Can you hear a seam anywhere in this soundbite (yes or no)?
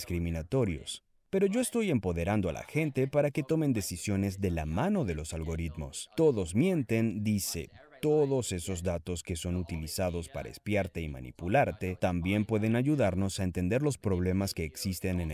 no